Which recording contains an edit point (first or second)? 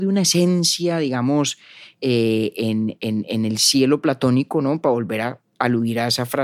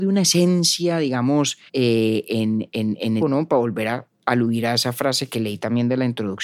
second